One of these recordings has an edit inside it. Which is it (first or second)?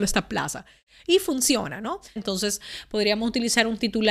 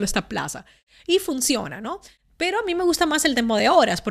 first